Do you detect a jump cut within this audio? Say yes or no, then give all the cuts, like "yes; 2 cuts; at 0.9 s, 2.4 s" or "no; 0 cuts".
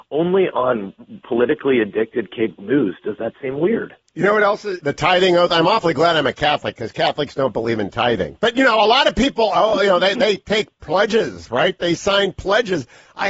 yes; 1 cut; at 4.8 s